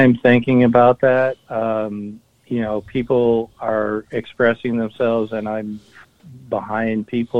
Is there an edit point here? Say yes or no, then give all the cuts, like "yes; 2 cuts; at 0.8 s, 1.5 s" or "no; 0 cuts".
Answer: no; 0 cuts